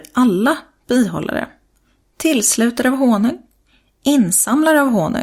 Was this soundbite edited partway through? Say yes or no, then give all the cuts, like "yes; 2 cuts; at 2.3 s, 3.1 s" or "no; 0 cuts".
no; 0 cuts